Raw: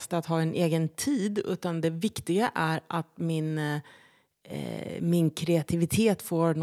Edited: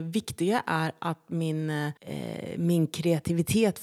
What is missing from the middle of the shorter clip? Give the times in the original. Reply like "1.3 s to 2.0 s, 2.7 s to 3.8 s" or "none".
3.8 s to 4.4 s